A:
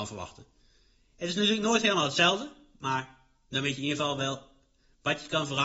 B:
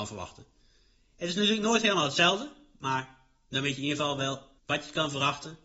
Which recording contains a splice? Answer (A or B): B